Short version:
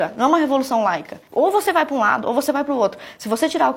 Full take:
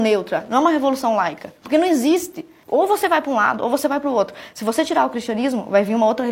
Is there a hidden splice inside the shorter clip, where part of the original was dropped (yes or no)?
yes